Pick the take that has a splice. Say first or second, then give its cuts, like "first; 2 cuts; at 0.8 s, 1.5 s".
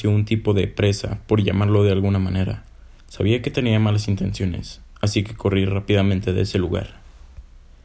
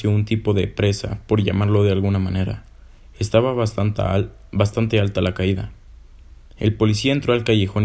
first; 1 cut; at 3.0 s